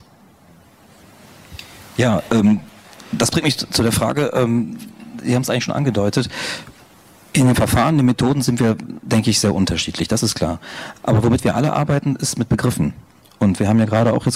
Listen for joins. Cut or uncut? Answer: uncut